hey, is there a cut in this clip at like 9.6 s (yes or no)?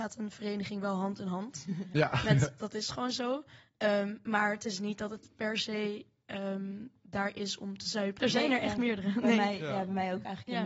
no